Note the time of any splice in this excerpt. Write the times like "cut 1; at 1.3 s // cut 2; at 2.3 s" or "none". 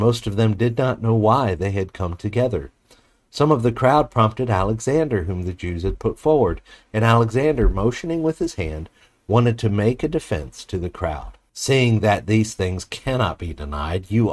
cut 1; at 11.5 s